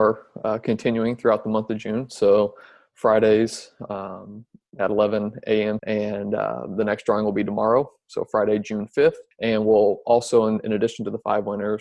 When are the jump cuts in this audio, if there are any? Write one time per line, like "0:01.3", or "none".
0:05.8
0:09.3